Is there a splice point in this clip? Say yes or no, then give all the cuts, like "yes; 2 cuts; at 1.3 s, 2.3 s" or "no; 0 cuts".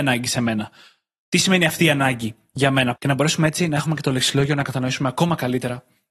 yes; 1 cut; at 3.0 s